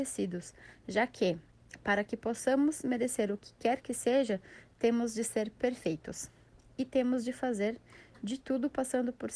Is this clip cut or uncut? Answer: uncut